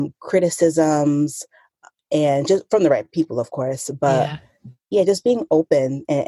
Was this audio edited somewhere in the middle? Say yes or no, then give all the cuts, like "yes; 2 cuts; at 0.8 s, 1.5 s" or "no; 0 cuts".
no; 0 cuts